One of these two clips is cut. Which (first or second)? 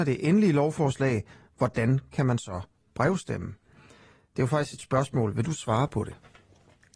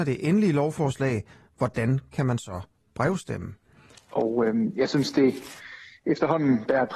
second